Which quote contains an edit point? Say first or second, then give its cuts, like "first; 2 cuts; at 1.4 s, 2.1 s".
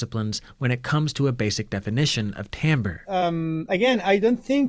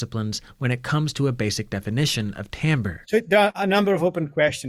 second; 1 cut; at 3.0 s